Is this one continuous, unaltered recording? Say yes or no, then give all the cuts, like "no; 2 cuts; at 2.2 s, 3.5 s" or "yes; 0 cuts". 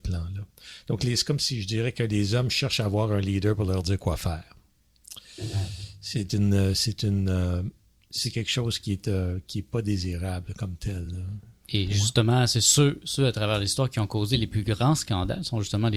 yes; 0 cuts